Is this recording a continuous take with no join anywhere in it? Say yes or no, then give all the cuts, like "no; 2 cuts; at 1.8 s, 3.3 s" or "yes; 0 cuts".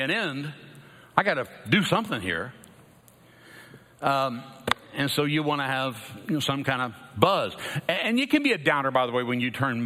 yes; 0 cuts